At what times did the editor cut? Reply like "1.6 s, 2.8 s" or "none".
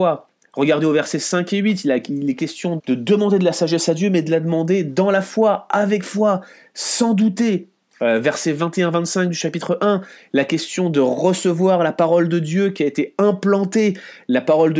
2.8 s